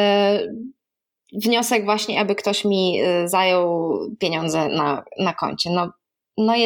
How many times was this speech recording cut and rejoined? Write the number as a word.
zero